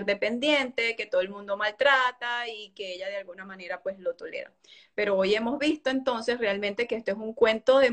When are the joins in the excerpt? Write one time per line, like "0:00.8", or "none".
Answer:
none